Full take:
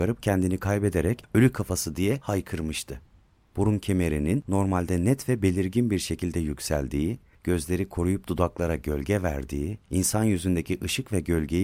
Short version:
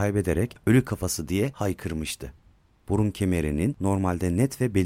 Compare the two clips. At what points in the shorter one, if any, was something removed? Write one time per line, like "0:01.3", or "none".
none